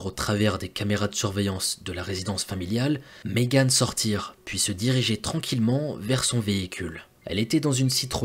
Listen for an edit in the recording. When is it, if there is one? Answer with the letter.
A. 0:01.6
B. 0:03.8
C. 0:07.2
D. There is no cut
D